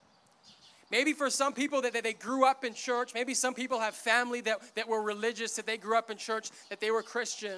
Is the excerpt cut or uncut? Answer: uncut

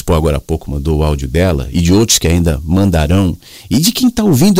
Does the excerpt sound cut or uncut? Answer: uncut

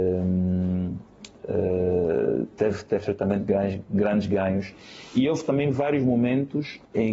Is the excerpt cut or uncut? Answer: uncut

